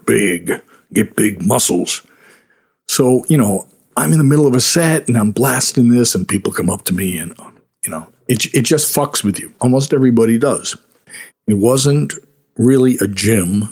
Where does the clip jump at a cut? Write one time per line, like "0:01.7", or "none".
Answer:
0:09.6
0:11.3